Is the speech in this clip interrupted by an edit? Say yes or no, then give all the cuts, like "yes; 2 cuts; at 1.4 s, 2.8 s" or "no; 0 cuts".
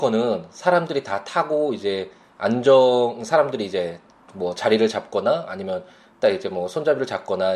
no; 0 cuts